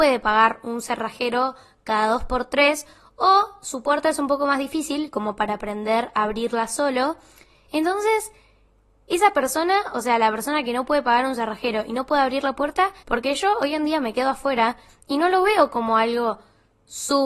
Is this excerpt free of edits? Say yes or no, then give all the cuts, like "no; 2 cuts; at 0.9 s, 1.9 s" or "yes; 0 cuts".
no; 1 cut; at 13.0 s